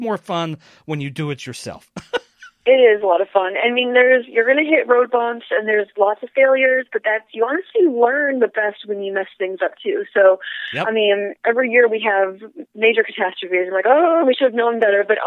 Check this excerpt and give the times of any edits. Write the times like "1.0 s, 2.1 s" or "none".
none